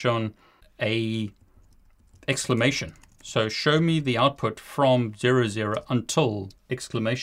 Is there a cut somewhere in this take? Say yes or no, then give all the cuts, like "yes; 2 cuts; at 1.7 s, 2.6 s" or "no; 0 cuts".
no; 0 cuts